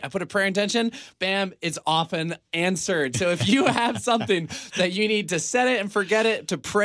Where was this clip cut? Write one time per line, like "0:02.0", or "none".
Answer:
0:01.1